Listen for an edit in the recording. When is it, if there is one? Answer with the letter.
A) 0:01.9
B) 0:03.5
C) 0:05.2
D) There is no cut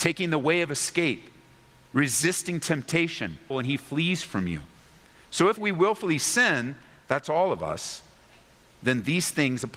B